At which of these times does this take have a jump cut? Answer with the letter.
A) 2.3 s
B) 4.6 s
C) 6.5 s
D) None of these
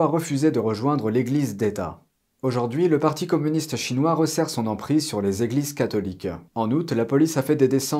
C